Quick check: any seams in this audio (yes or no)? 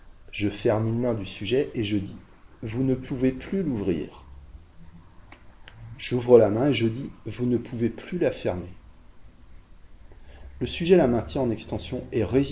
yes